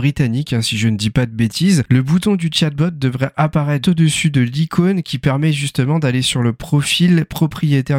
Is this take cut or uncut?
cut